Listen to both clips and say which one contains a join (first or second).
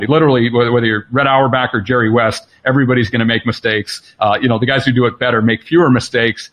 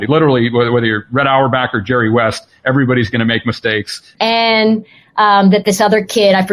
second